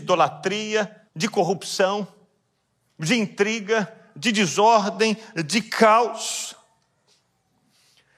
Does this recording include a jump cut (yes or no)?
yes